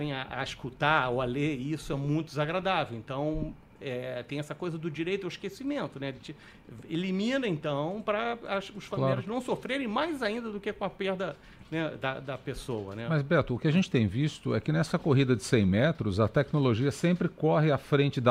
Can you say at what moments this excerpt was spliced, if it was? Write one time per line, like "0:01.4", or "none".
none